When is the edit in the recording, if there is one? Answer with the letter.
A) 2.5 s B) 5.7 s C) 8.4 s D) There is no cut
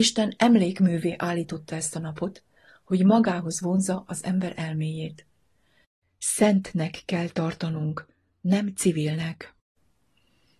D